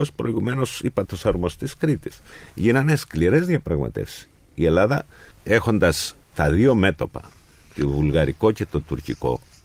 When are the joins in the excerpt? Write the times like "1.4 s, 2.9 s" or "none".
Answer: none